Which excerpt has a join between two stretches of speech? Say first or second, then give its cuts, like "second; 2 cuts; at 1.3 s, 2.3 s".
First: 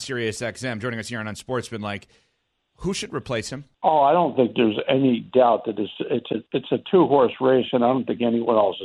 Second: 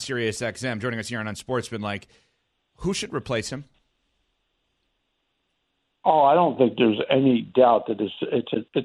first; 1 cut; at 3.7 s